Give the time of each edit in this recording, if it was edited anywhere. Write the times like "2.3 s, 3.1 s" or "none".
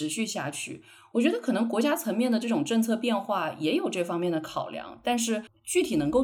none

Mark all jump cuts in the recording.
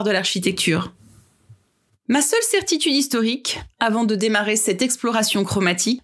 none

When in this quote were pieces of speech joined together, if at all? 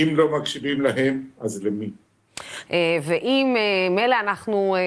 2.7 s

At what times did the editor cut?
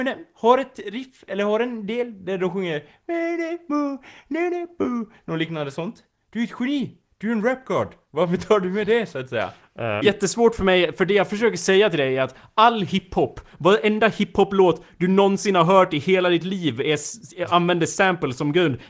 6.2 s, 10.0 s

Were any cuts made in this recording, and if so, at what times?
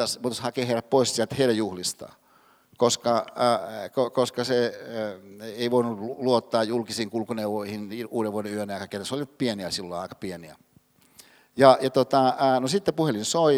none

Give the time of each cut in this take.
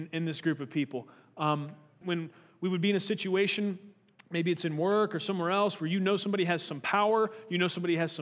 2.0 s

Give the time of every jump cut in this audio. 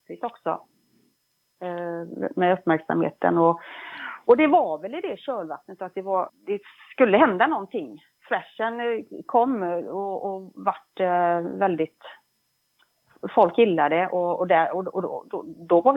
6.3 s

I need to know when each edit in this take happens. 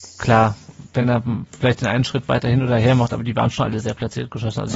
none

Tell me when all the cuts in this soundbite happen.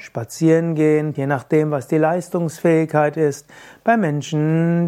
1.1 s

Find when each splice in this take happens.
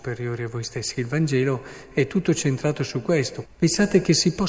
1.0 s, 3.4 s

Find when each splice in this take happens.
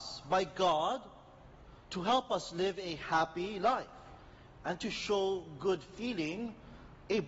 none

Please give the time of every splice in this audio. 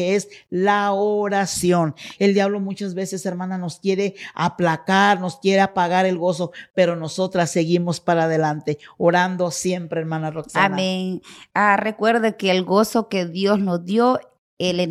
2.1 s

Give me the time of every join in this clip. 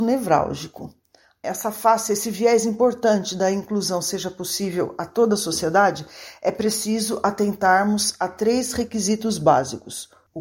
1.4 s

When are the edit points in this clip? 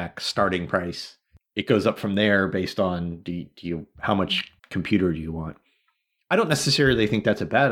4.6 s

